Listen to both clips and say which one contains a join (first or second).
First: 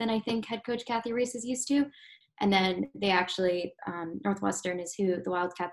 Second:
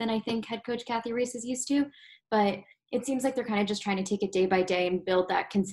first